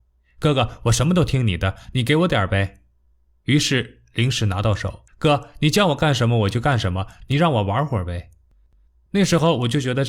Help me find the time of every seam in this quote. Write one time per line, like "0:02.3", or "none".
0:05.1
0:09.1